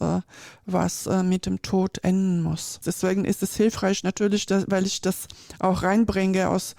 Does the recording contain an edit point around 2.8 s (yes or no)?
yes